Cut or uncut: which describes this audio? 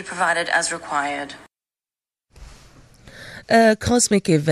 cut